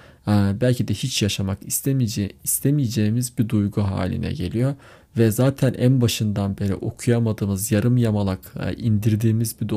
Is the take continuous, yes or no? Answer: yes